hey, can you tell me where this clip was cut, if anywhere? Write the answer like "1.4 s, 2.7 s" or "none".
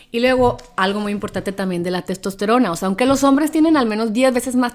none